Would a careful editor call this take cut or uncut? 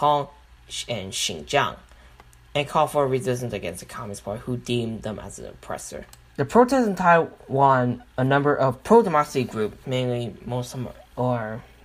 cut